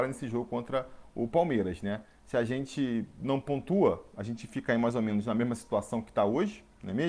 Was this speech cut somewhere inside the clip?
no; 0 cuts

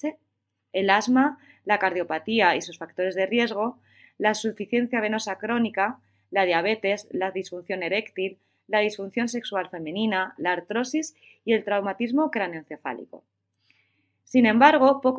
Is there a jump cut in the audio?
yes; 1 cut; at 10.4 s

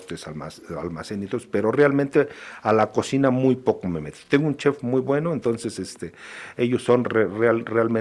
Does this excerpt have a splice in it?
no; 0 cuts

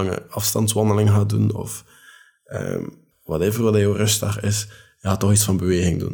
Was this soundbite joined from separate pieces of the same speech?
yes; 1 cut; at 3.1 s

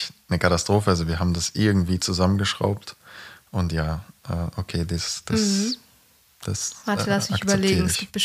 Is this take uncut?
yes; 0 cuts

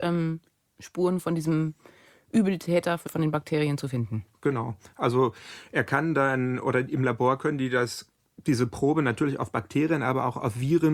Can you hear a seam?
yes; 1 cut; at 3.1 s

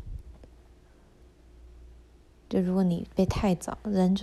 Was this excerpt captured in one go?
yes; 0 cuts

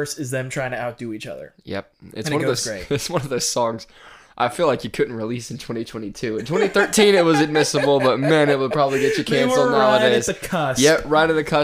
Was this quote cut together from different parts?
no; 0 cuts

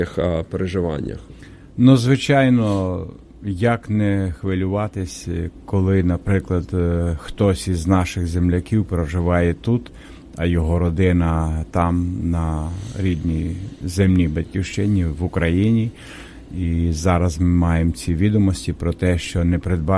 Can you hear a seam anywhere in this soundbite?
no; 0 cuts

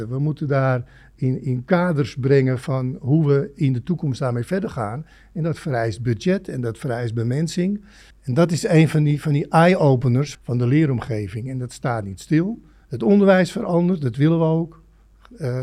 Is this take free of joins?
no; 2 cuts; at 8.1 s, 10.3 s

